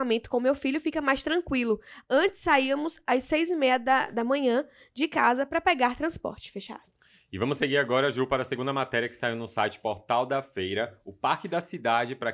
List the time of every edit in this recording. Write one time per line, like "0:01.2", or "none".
none